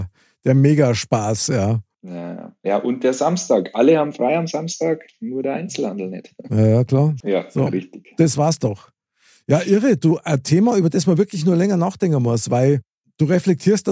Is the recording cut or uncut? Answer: cut